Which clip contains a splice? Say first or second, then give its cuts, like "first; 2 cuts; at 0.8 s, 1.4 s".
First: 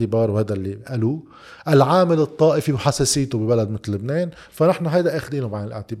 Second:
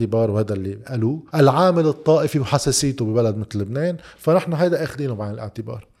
second; 1 cut; at 1.3 s